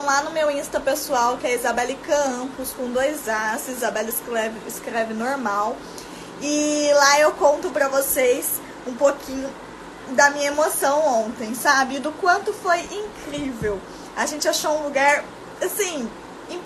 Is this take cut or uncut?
uncut